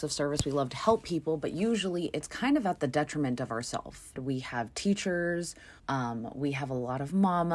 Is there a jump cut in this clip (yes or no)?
yes